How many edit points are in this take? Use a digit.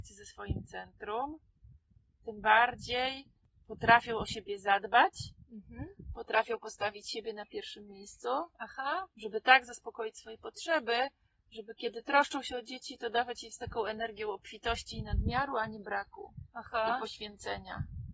0